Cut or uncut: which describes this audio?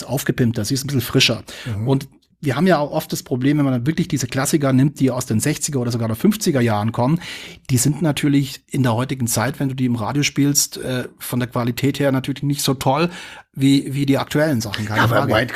uncut